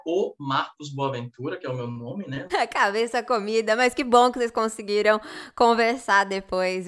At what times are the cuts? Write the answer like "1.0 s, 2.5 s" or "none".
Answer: 2.5 s